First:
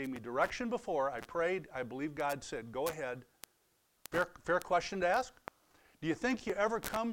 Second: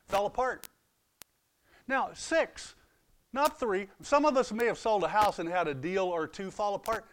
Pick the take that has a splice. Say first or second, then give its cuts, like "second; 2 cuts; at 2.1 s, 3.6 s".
first; 1 cut; at 4.0 s